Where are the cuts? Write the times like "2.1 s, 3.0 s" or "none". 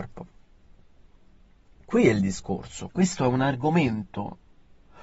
1.7 s